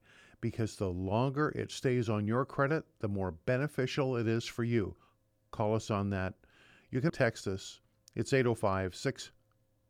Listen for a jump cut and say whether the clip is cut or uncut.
cut